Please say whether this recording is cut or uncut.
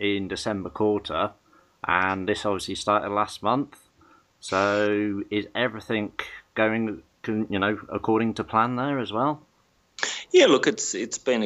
uncut